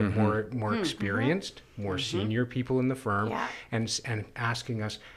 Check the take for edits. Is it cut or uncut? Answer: uncut